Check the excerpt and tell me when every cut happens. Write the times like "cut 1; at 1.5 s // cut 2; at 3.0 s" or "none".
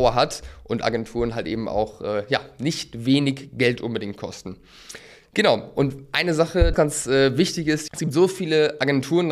cut 1; at 6.7 s // cut 2; at 7.9 s